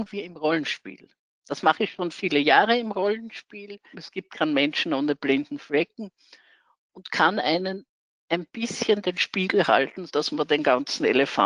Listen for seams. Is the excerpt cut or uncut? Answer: cut